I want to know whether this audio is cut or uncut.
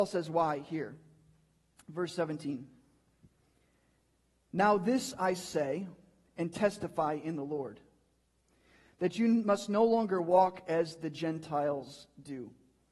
uncut